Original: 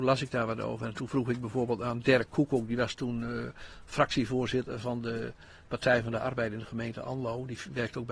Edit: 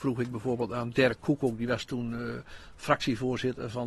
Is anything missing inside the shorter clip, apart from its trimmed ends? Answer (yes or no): no